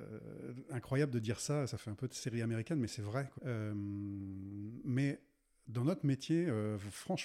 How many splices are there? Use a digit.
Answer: 1